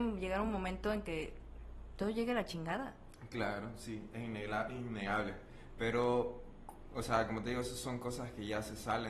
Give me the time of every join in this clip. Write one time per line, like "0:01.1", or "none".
none